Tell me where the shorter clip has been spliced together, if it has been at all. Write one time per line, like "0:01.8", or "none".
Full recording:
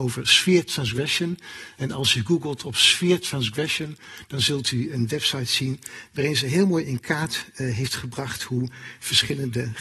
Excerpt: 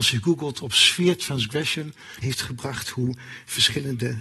0:02.2